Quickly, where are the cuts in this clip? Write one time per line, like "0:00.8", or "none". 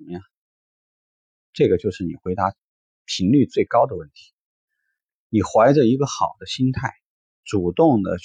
none